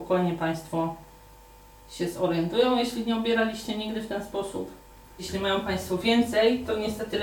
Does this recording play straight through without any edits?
yes; 0 cuts

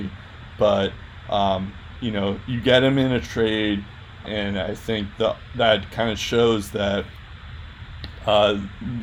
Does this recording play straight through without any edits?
no; 1 cut; at 4.2 s

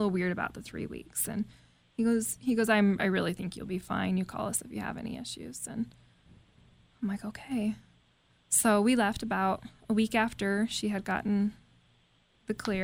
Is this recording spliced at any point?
no; 0 cuts

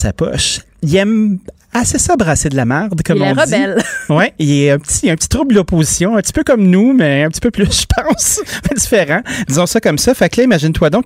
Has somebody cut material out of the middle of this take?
no; 0 cuts

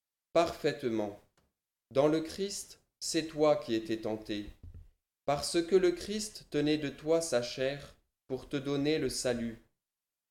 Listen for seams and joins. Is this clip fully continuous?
no; 1 cut; at 1.7 s

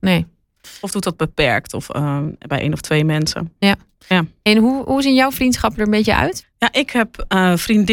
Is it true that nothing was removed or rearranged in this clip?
no; 1 cut; at 6.4 s

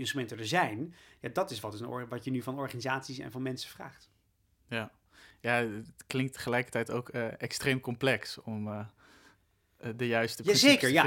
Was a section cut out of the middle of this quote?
no; 0 cuts

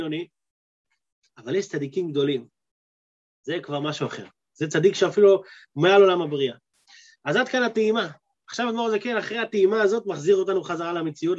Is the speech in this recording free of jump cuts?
no; 1 cut; at 1.3 s

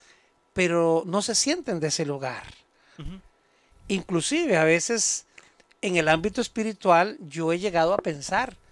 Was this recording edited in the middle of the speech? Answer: no; 0 cuts

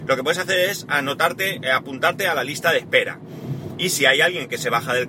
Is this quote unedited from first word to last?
yes; 0 cuts

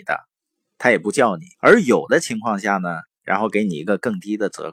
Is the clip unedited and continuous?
no; 2 cuts; at 1.5 s, 3.2 s

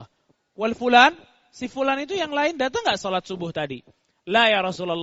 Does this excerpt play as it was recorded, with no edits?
yes; 0 cuts

